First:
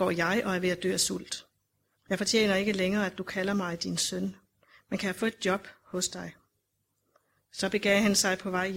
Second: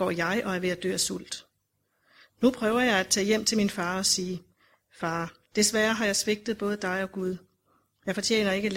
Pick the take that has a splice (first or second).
first